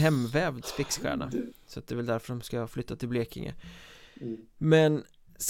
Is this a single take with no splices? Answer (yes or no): no